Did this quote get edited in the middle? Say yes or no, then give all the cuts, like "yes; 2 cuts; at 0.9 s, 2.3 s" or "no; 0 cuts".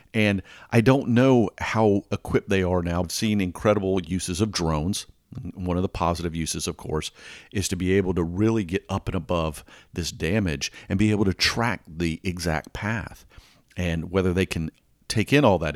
yes; 1 cut; at 3.0 s